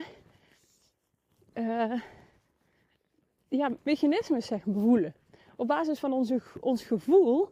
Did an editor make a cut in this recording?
yes; 1 cut; at 3.8 s

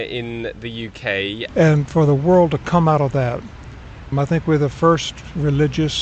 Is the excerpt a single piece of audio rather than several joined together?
no; 2 cuts; at 1.5 s, 4.1 s

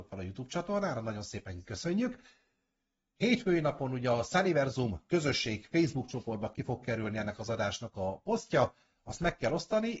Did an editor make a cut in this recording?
no; 0 cuts

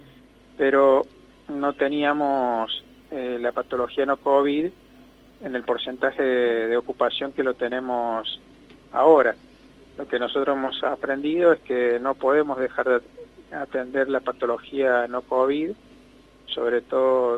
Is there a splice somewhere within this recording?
no; 0 cuts

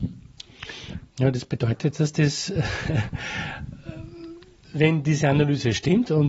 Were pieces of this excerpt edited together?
no; 0 cuts

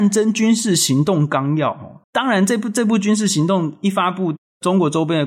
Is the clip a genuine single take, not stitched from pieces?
no; 1 cut; at 2.0 s

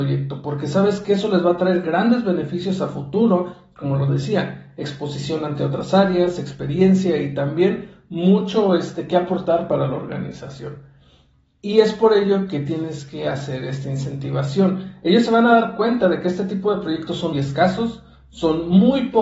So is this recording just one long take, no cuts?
no; 1 cut; at 17.3 s

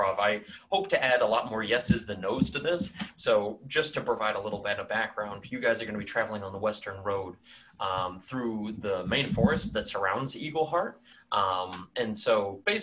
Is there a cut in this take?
yes; 2 cuts; at 3.1 s, 11.1 s

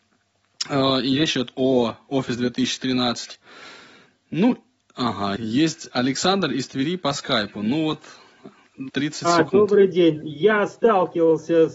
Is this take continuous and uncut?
no; 3 cuts; at 5.4 s, 8.9 s, 10.2 s

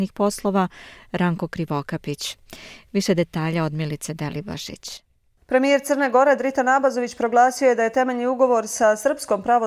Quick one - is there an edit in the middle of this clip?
no; 0 cuts

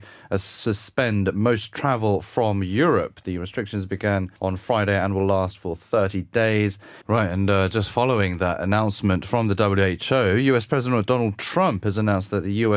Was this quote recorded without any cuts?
no; 2 cuts; at 4.4 s, 7.0 s

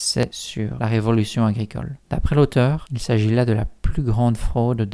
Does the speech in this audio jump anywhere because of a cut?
no; 0 cuts

